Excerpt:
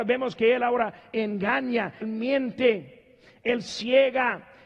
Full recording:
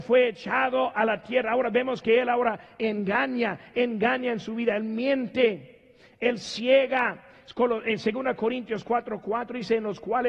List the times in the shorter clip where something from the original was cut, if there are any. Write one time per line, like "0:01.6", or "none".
0:02.0